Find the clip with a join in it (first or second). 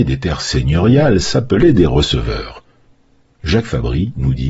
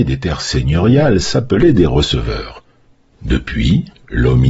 second